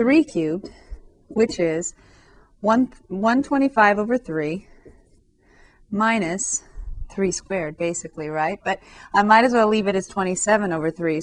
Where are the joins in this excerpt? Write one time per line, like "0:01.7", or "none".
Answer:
none